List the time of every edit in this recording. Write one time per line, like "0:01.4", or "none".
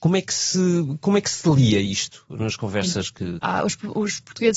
0:03.4